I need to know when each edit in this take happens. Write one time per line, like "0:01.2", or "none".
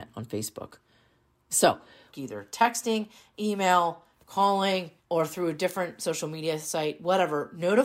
0:02.1
0:05.0